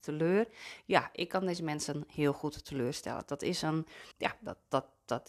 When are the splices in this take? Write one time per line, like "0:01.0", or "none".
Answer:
0:04.1